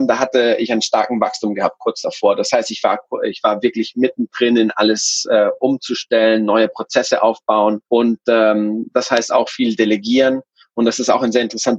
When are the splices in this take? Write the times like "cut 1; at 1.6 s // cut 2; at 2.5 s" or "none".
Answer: cut 1; at 7.8 s